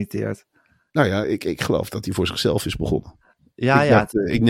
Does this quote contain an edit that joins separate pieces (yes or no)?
no